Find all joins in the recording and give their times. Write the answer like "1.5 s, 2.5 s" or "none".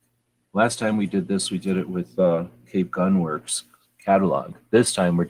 none